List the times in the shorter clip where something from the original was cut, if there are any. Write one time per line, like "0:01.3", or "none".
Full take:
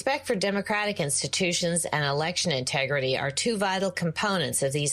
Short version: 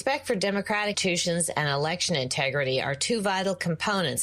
0:00.9

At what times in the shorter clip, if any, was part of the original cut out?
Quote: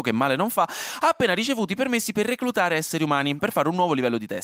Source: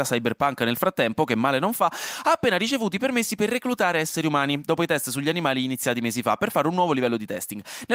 0:03.4

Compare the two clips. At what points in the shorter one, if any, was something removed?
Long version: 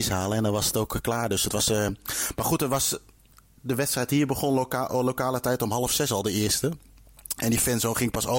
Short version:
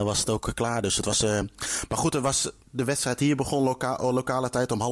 0:02.6

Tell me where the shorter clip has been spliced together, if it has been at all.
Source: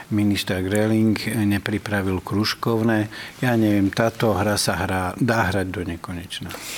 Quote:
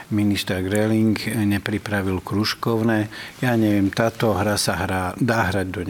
none

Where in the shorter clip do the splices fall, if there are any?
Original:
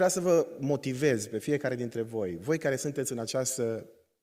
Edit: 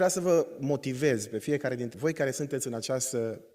0:01.9

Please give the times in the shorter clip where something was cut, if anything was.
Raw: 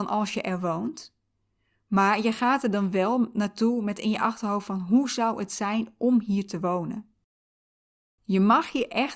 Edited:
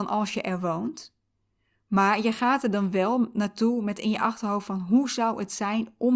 none

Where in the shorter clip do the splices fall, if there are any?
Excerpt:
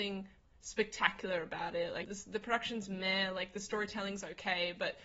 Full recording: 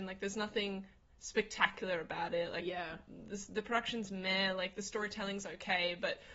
0:02.0

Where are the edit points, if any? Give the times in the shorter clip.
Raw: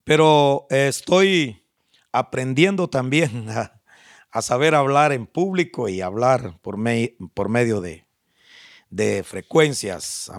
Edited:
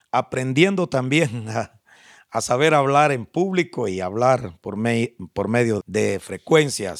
0:05.8

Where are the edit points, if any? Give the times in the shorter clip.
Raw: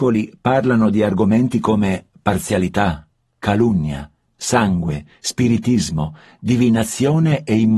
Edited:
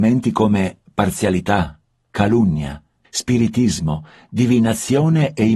0:03.0

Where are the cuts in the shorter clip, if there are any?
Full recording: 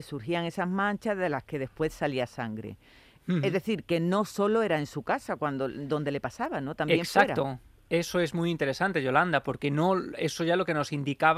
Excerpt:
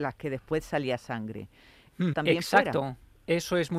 0:02.1

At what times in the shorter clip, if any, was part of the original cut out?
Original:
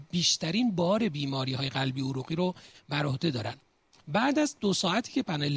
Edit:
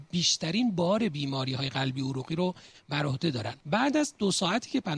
0:03.6

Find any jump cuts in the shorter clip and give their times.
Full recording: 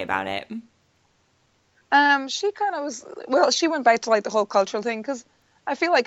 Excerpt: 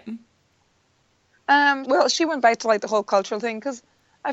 0:01.8

